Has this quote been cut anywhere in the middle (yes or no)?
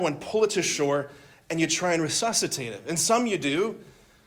no